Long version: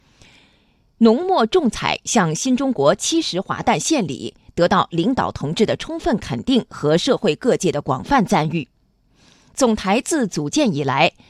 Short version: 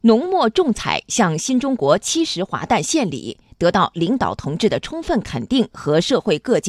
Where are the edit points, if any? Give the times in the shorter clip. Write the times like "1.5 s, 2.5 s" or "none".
none